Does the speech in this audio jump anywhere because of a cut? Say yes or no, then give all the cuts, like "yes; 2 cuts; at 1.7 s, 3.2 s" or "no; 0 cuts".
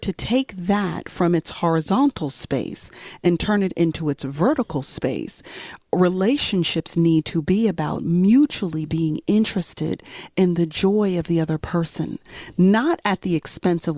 no; 0 cuts